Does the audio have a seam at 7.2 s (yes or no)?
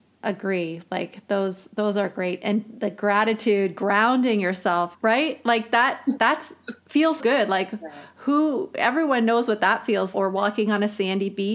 yes